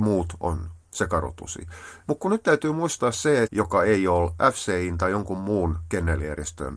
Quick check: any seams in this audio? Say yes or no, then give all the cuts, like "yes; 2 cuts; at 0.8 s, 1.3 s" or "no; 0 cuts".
yes; 2 cuts; at 2.0 s, 3.4 s